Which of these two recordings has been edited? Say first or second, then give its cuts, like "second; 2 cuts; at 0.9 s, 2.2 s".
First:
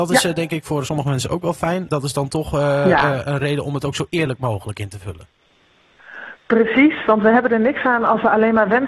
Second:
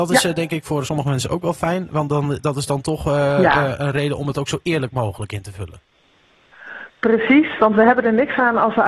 first; 1 cut; at 1.9 s